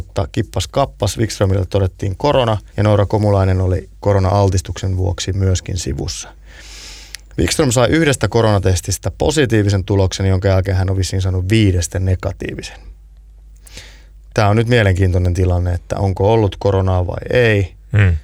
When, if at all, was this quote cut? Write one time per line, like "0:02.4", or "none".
0:02.7